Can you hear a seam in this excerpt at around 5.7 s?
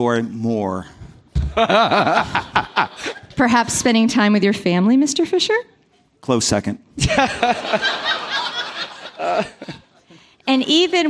no; 0 cuts

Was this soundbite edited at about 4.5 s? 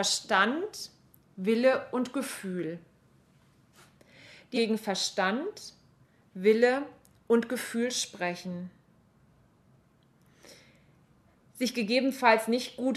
yes; 1 cut; at 4.5 s

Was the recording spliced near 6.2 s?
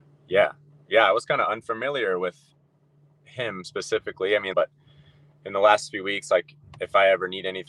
no; 1 cut; at 4.5 s

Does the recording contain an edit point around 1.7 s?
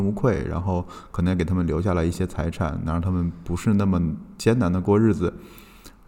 no; 0 cuts

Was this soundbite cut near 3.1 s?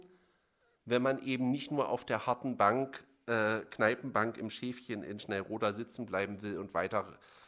no; 0 cuts

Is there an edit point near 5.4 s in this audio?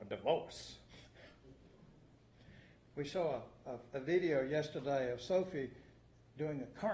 no; 1 cut; at 2.9 s

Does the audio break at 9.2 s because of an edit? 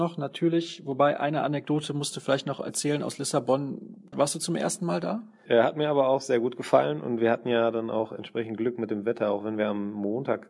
no; 2 cuts; at 4.1 s, 5.5 s

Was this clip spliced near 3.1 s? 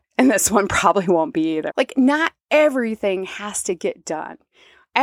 no; 1 cut; at 1.7 s

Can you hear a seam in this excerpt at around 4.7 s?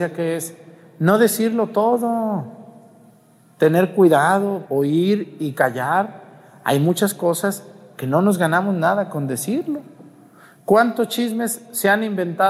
yes; 1 cut; at 4.7 s

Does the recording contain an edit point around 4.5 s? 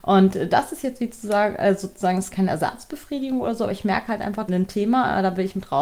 yes; 2 cuts; at 2.3 s, 4.5 s

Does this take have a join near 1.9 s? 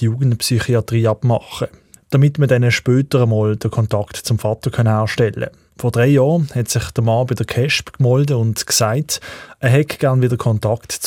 yes; 2 cuts; at 1.9 s, 5.7 s

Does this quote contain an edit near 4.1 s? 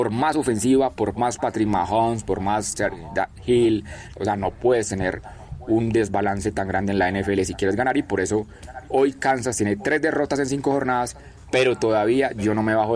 yes; 1 cut; at 4.1 s

